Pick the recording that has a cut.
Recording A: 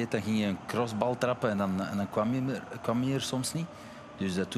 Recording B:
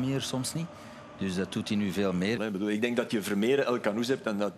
B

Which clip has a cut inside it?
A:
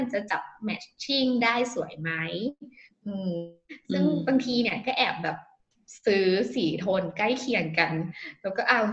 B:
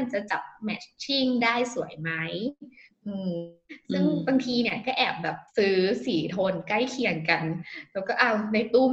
B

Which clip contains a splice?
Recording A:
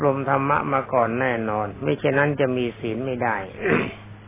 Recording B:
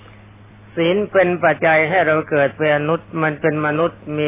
B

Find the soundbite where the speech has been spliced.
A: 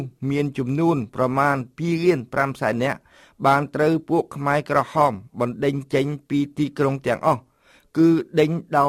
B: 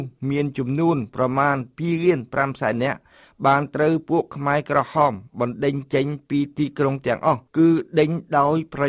B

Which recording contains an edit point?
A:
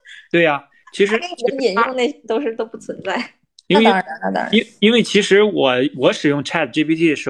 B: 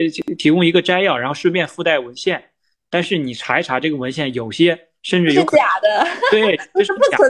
A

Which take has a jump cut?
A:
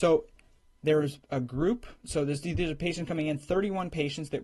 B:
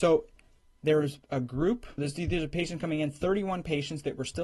B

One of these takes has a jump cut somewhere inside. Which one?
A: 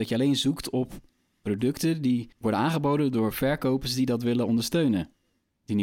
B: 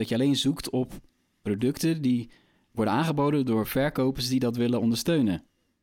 A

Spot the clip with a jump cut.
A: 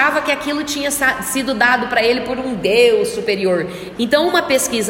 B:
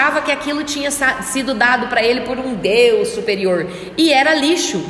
A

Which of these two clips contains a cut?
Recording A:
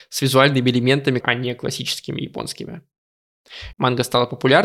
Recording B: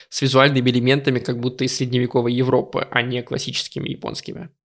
A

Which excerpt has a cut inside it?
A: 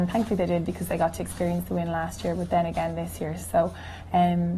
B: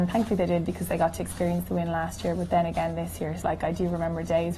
B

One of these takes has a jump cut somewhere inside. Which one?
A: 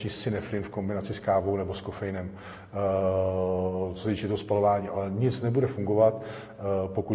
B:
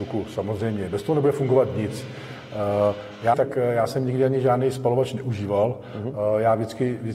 B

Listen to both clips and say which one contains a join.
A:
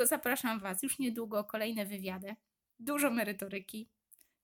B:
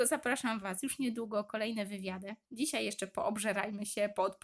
B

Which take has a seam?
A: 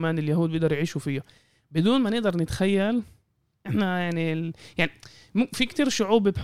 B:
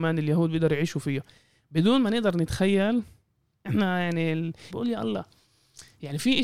B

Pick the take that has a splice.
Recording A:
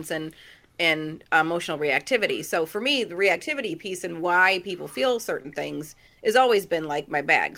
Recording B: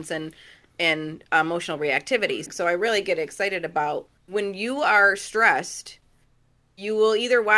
B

